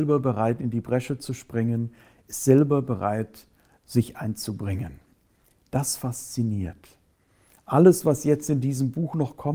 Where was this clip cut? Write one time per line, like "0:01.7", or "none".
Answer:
none